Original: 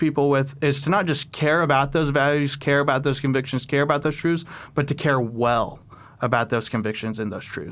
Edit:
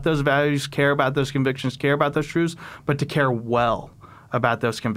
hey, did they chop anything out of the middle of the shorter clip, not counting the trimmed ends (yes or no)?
no